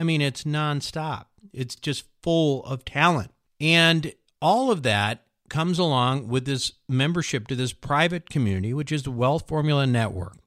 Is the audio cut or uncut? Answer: uncut